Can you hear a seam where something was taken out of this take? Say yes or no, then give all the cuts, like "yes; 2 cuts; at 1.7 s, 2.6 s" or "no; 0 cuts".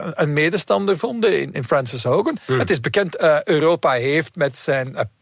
yes; 1 cut; at 1.5 s